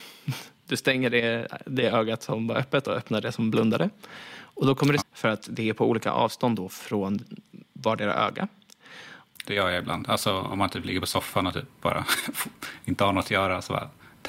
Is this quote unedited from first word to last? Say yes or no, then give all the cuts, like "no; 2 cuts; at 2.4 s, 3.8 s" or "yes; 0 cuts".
no; 2 cuts; at 5.0 s, 9.4 s